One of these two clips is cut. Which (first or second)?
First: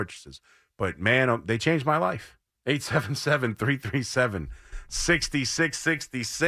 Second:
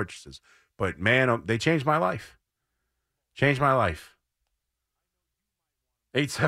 first